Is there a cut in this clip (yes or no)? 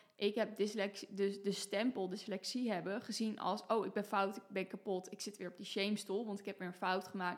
no